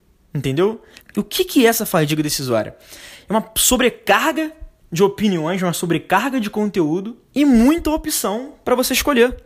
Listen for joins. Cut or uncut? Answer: cut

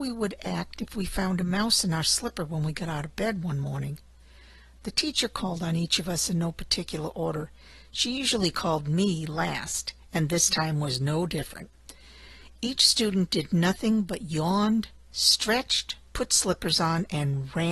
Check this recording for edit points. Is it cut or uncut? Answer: uncut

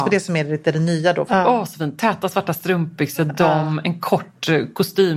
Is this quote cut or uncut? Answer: cut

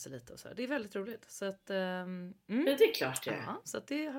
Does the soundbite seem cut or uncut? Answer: uncut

